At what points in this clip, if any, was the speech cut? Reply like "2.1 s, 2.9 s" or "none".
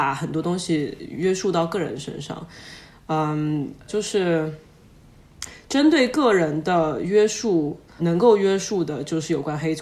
3.9 s, 8.0 s